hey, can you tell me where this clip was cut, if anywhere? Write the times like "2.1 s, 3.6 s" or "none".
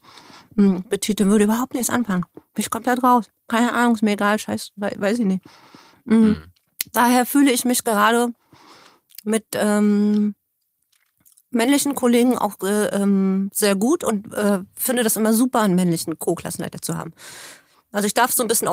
none

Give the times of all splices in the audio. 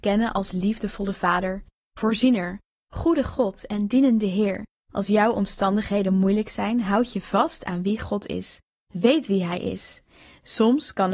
1.9 s

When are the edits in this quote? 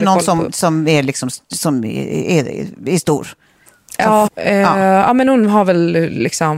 4.3 s

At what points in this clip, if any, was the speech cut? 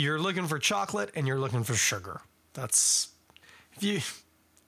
none

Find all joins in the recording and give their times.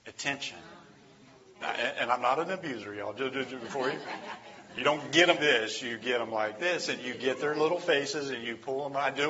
1.6 s, 5.4 s

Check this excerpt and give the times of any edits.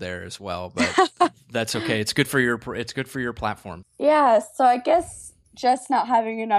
3.8 s

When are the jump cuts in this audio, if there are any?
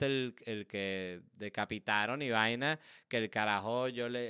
none

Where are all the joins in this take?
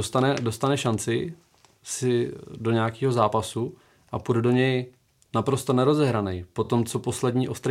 none

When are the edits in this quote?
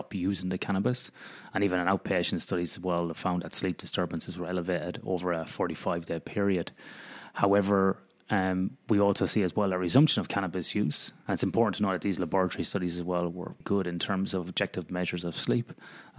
11.2 s, 13.6 s

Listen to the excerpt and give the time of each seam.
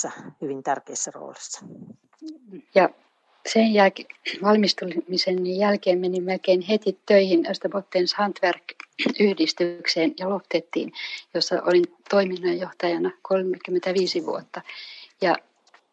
2.7 s

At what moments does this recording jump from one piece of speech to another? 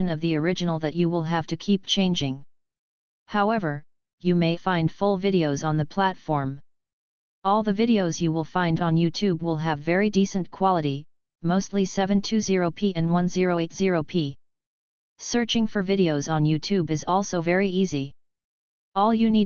4.6 s

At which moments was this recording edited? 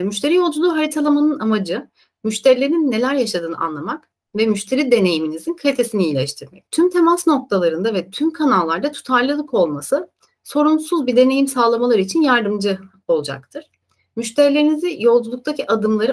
6.7 s

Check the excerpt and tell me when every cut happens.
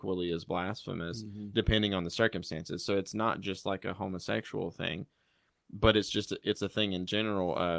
none

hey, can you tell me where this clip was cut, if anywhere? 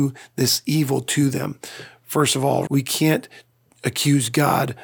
2.7 s

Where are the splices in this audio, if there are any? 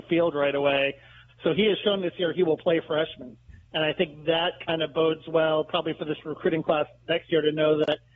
1.3 s

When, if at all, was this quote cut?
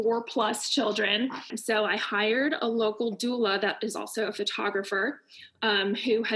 1.5 s

